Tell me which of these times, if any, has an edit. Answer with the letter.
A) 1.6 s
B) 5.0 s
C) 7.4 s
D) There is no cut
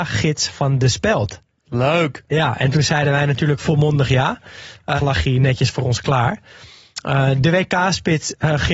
B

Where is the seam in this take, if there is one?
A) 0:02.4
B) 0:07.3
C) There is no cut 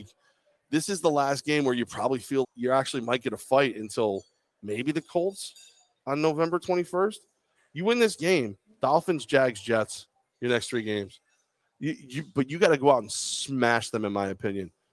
A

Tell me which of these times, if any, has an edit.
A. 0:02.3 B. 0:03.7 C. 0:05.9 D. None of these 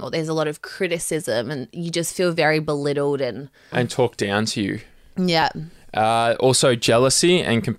B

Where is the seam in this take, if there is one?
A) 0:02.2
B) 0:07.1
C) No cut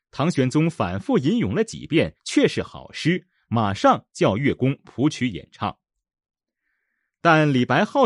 A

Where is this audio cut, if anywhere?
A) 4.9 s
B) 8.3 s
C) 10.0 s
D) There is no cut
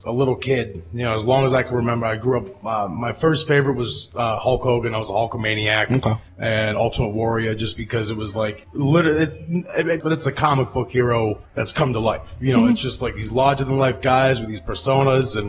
C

